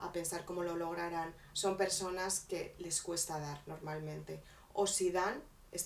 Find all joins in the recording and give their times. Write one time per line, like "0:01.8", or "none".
0:01.5